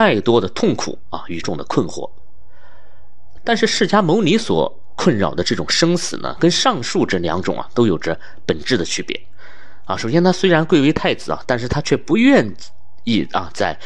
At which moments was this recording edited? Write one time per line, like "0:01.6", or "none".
0:01.4
0:03.4
0:06.4